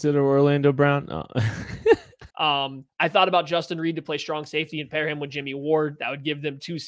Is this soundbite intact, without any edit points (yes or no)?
no